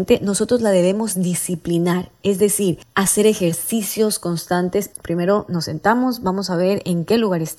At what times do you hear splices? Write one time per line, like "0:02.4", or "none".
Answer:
0:04.9